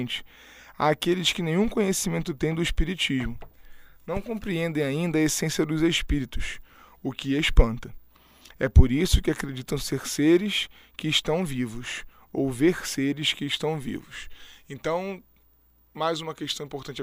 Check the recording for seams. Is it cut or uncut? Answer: uncut